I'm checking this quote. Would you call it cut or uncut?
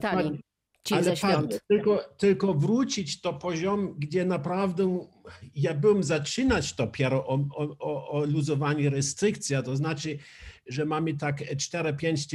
uncut